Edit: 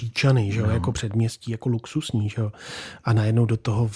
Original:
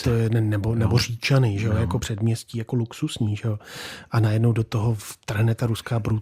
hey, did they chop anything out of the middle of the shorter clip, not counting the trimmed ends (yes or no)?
no